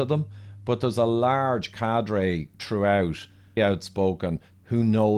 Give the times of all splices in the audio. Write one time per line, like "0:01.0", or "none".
0:03.6

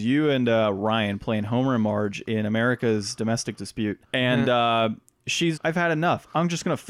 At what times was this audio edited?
0:04.0
0:05.6

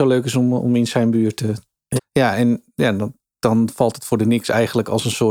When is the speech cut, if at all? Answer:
0:02.0

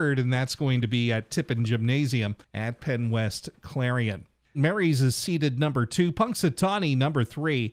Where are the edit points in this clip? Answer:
0:04.5

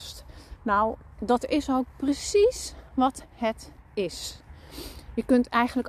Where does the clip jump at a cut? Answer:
none

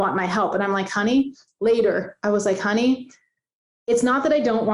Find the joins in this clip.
none

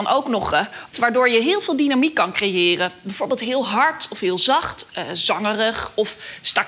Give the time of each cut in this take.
0:00.9

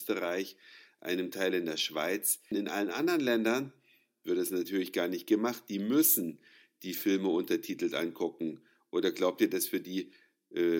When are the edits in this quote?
0:02.5

